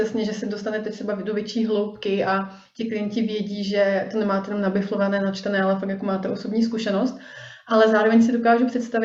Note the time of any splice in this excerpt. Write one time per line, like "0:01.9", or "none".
none